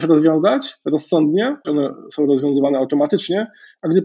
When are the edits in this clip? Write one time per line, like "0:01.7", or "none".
0:01.6